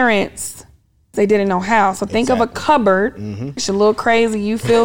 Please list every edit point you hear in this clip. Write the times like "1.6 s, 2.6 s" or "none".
1.1 s, 3.6 s